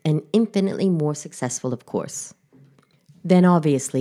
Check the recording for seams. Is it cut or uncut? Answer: uncut